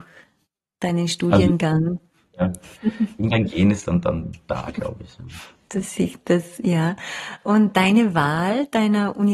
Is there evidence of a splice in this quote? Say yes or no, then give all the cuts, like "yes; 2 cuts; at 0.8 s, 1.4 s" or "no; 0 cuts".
yes; 1 cut; at 2.2 s